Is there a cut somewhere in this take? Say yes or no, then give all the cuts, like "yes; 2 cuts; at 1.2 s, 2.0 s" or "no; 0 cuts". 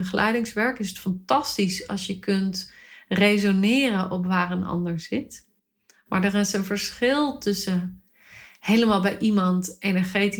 no; 0 cuts